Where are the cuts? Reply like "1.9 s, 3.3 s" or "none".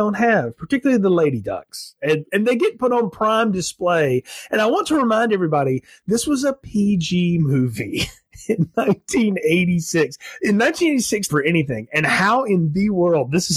11.3 s

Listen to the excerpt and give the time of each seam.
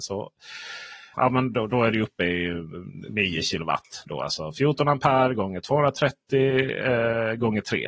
1.1 s

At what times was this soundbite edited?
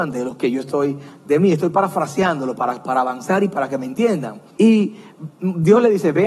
4.5 s

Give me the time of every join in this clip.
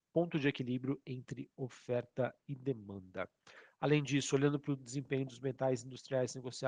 none

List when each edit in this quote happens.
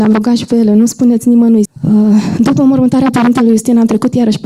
1.7 s

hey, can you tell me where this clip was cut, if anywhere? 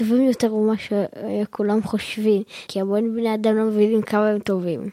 2.7 s

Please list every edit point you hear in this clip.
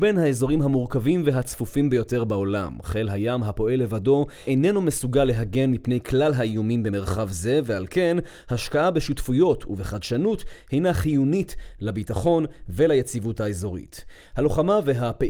none

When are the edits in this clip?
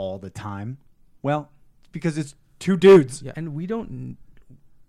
3.3 s

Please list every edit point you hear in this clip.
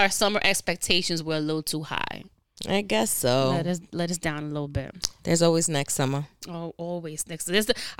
5.2 s

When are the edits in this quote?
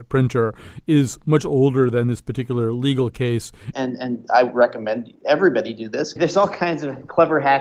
3.7 s, 6.2 s

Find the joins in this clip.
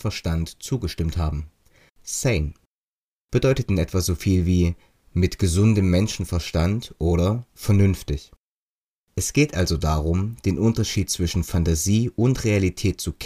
1.9 s

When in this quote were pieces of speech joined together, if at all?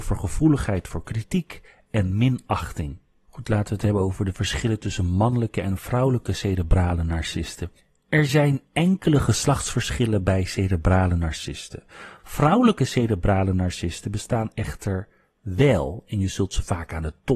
12.2 s

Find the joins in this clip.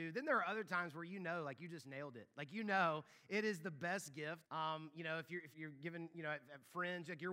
4.4 s, 5.5 s

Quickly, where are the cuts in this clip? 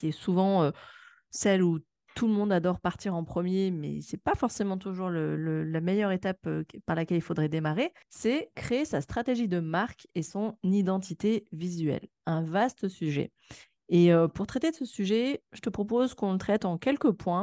8.0 s

